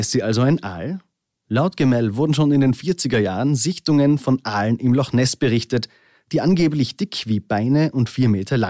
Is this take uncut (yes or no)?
yes